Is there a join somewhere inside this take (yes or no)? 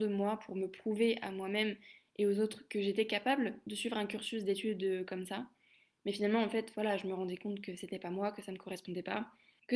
no